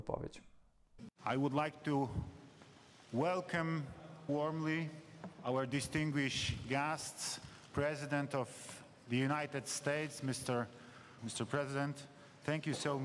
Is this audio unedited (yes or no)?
no